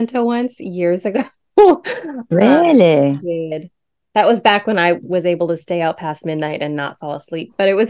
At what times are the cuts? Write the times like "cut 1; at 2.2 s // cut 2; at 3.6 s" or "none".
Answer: cut 1; at 3.2 s